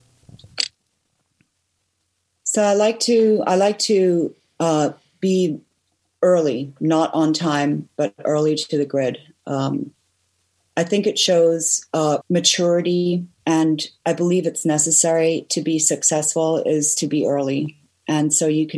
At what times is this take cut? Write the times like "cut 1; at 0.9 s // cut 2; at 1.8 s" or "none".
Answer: cut 1; at 12.2 s // cut 2; at 13.3 s